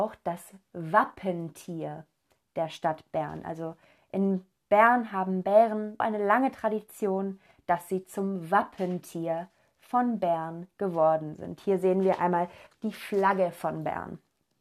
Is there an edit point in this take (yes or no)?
yes